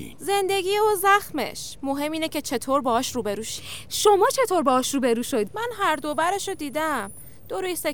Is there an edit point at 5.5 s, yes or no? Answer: yes